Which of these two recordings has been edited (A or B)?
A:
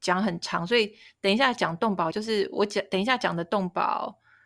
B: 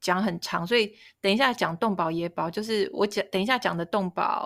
A